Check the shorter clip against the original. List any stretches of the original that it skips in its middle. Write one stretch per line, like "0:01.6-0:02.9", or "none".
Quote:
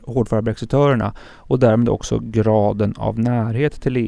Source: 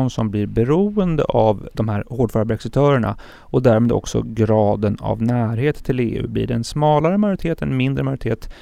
none

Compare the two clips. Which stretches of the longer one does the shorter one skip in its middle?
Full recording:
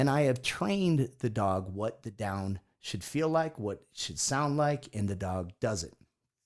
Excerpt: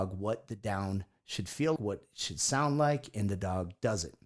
0:03.3-0:03.5

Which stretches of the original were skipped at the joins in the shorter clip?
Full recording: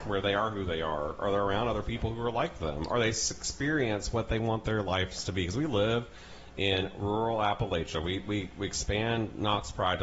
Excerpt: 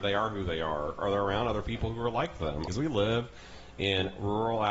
0:02.9-0:05.5

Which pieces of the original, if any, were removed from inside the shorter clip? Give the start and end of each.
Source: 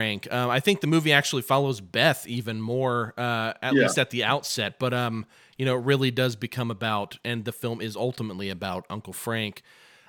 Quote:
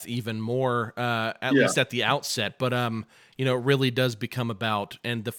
none

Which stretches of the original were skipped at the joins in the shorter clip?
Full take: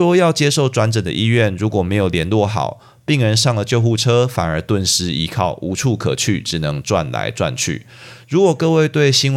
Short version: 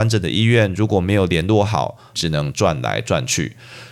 0:03.0-0:06.4

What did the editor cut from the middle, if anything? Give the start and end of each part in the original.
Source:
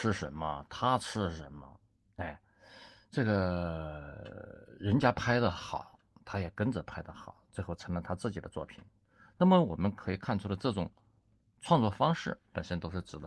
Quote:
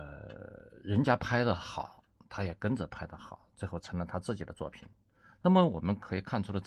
none

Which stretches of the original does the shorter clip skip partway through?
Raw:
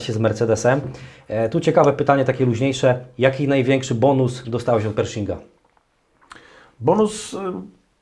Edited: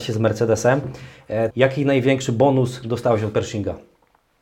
0:01.5-0:03.1

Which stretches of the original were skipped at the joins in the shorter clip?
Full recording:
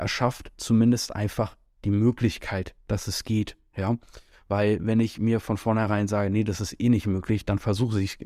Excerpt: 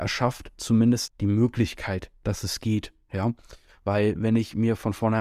0:01.1-0:01.7

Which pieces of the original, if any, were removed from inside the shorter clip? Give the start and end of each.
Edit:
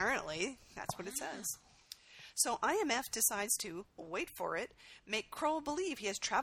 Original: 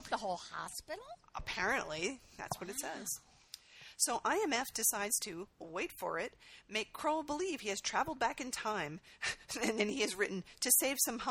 none

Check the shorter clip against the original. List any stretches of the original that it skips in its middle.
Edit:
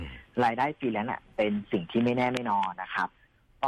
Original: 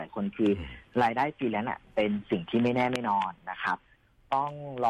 0:03.3-0:03.4

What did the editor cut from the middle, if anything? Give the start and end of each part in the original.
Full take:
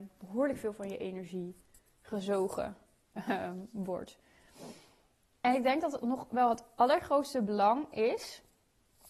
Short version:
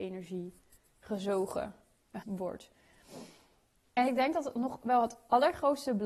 0:03.2-0:03.7

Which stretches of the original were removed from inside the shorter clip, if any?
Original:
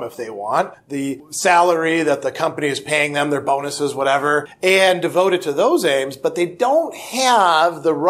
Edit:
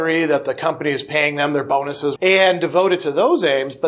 0:03.9-0:04.6

